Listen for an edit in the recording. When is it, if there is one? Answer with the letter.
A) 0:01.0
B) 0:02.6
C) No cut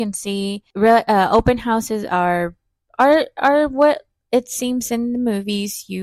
C